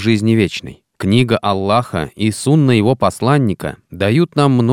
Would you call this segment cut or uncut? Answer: cut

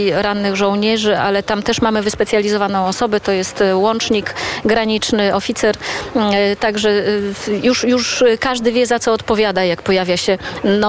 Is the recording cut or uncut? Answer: uncut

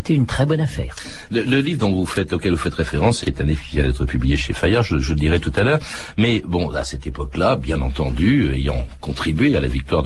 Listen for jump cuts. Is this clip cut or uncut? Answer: cut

